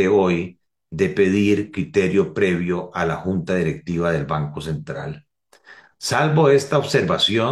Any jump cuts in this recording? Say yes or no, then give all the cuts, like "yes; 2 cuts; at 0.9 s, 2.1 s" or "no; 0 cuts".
yes; 1 cut; at 5.9 s